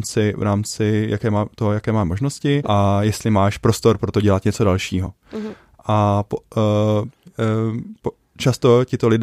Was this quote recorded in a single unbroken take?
no; 2 cuts; at 2.6 s, 7.3 s

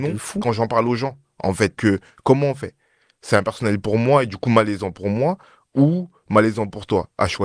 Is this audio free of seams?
no; 1 cut; at 1.8 s

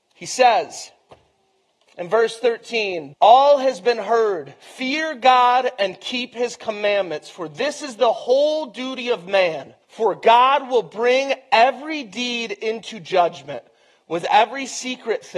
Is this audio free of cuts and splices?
no; 2 cuts; at 3.1 s, 9.8 s

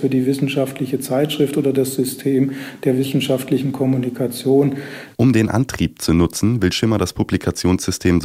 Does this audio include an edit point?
yes; 1 cut; at 5.1 s

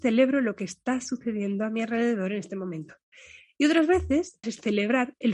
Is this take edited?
yes; 1 cut; at 4.4 s

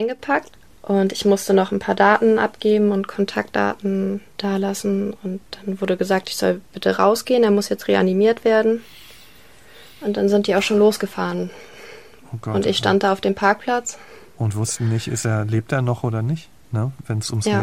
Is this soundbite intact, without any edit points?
yes; 0 cuts

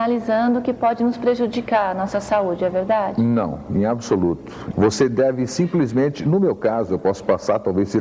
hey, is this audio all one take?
no; 1 cut; at 4.7 s

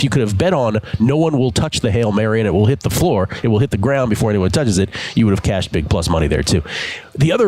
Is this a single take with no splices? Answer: yes; 0 cuts

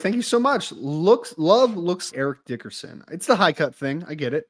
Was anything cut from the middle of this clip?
yes; 1 cut; at 2.1 s

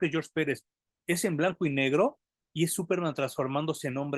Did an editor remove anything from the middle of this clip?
no; 0 cuts

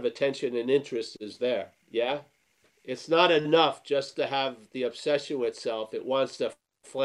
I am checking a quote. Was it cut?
yes; 1 cut; at 1.8 s

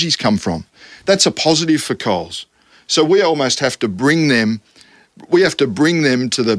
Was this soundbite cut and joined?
no; 0 cuts

